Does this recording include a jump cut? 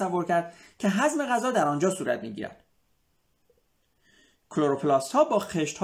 no; 0 cuts

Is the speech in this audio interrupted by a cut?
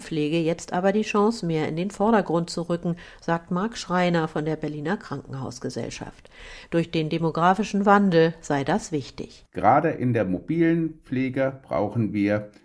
no; 0 cuts

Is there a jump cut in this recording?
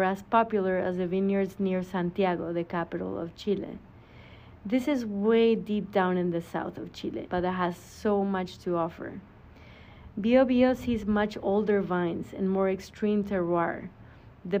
yes; 1 cut; at 7.3 s

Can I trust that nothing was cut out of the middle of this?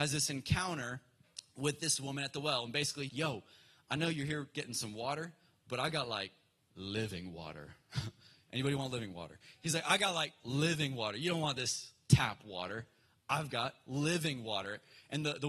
no; 1 cut; at 3.1 s

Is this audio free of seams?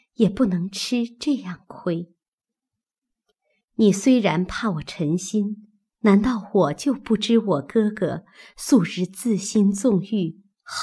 no; 1 cut; at 5.9 s

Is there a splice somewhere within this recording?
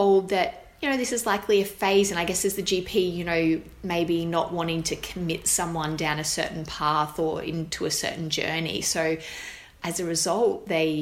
no; 0 cuts

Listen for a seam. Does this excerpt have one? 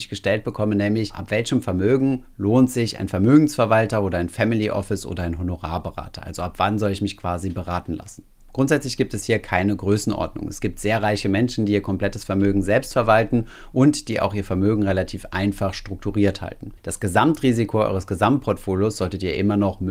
yes; 1 cut; at 16.8 s

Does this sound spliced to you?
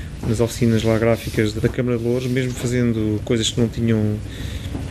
yes; 1 cut; at 1.6 s

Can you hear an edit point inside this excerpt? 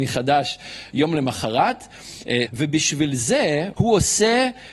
yes; 2 cuts; at 2.5 s, 3.7 s

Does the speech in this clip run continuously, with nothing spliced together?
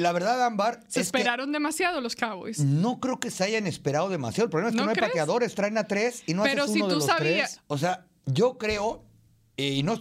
no; 1 cut; at 7.6 s

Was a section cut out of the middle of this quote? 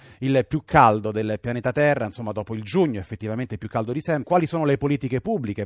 yes; 1 cut; at 4.2 s

